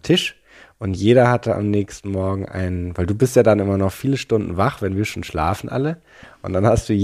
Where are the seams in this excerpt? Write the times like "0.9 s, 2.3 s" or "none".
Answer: none